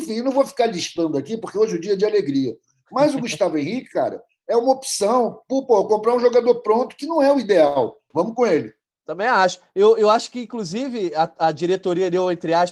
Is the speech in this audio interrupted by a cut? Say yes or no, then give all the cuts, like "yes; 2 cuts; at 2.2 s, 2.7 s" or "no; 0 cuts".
yes; 1 cut; at 8.1 s